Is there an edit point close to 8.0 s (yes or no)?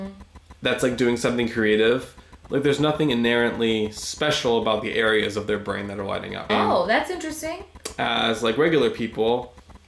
no